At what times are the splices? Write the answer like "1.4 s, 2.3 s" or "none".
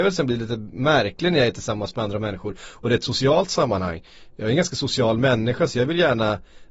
none